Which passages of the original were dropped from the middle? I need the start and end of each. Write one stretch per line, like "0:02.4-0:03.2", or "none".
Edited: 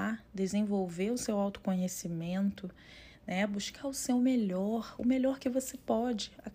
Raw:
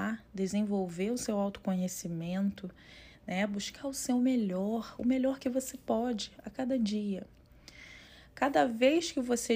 none